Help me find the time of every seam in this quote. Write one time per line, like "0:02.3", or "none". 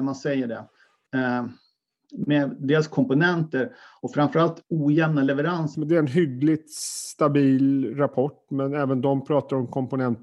0:01.1
0:05.7